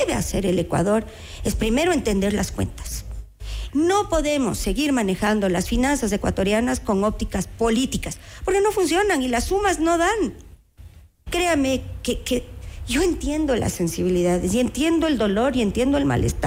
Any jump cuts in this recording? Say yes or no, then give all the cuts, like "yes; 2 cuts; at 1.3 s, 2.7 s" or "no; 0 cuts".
yes; 2 cuts; at 3.7 s, 11.3 s